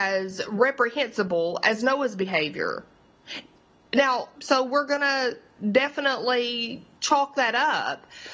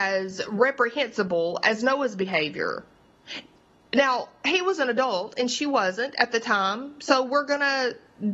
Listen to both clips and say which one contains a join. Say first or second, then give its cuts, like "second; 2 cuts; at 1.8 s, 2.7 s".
first; 2 cuts; at 4.4 s, 6.9 s